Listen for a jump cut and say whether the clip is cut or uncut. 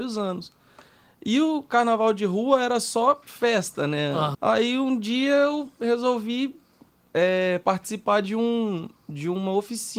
cut